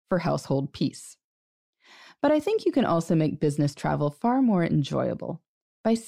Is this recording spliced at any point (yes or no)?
no